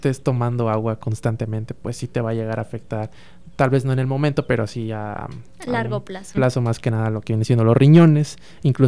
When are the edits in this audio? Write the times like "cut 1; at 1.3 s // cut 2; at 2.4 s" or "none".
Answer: cut 1; at 6.3 s